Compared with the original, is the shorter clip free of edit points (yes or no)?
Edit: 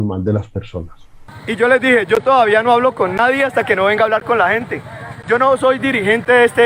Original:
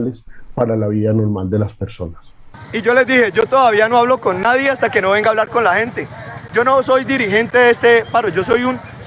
yes